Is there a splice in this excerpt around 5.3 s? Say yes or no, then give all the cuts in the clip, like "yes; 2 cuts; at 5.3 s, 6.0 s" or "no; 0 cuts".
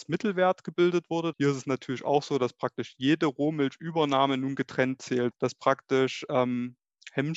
yes; 2 cuts; at 1.3 s, 5.3 s